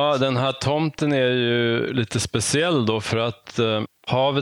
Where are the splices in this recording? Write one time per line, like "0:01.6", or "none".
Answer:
none